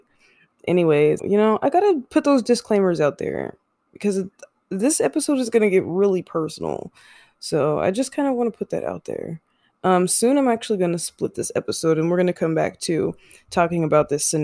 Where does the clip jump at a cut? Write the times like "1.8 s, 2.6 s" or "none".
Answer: 1.2 s